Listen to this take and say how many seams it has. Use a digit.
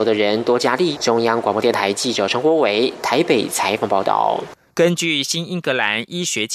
2